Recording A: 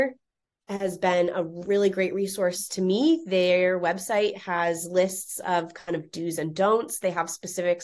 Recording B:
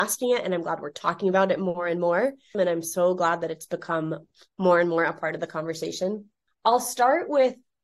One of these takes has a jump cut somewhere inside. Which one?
B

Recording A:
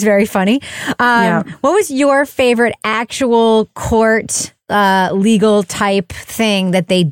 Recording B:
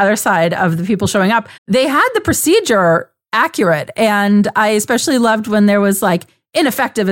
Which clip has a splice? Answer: B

